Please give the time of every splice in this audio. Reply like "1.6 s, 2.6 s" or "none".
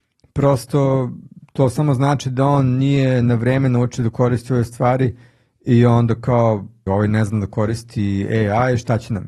6.9 s